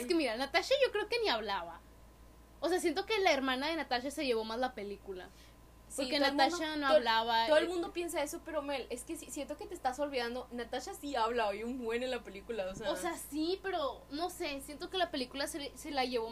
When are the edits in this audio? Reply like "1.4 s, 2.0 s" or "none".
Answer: none

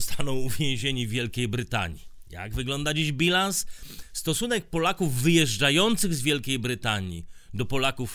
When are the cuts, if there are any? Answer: none

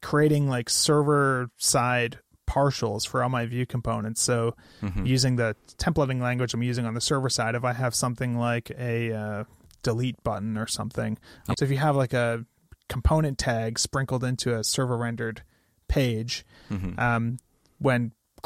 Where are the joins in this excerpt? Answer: 11.5 s

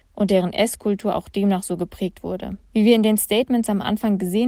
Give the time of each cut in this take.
2.7 s

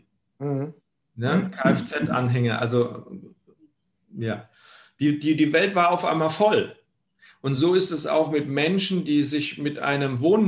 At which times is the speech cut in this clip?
none

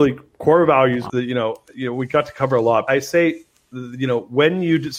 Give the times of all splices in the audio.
1.1 s, 2.9 s

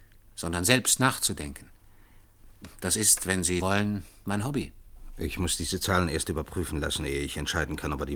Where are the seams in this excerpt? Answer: 3.6 s

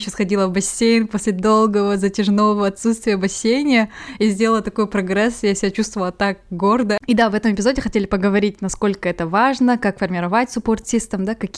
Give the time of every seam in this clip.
7.0 s

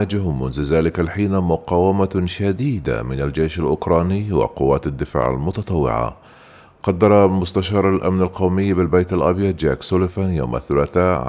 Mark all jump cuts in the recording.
none

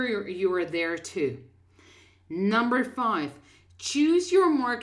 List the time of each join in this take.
none

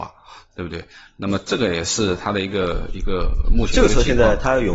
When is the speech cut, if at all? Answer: none

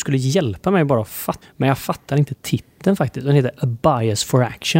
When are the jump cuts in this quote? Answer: 1.4 s

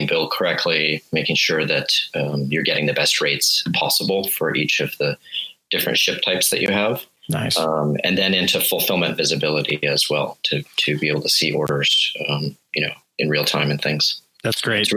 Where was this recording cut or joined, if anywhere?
none

